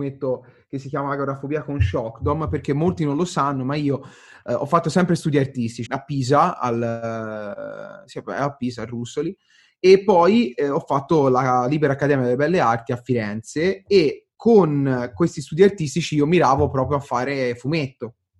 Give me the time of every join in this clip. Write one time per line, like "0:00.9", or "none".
0:05.9